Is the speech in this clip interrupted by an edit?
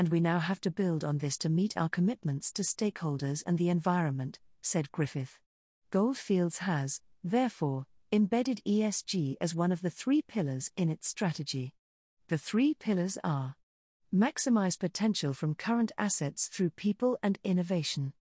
no; 0 cuts

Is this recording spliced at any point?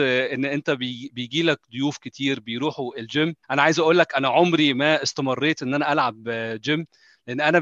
yes; 1 cut; at 3.4 s

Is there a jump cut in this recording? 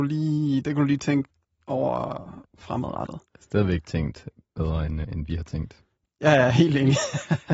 yes; 1 cut; at 5.0 s

